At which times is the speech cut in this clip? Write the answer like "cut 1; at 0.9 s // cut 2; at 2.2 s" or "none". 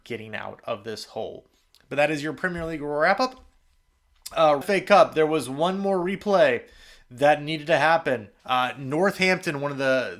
cut 1; at 4.6 s // cut 2; at 8.4 s